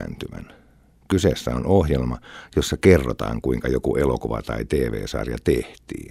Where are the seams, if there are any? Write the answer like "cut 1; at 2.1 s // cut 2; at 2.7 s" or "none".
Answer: none

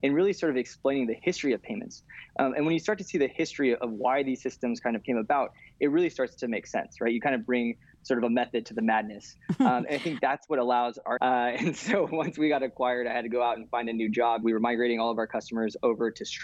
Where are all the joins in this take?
cut 1; at 11.2 s // cut 2; at 14.4 s

